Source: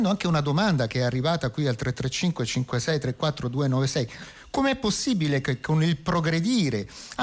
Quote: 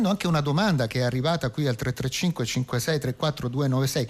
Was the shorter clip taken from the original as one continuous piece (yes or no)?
yes